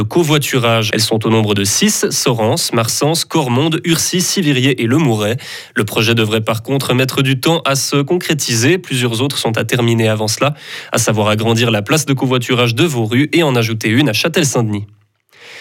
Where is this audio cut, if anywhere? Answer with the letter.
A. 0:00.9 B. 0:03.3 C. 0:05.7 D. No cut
A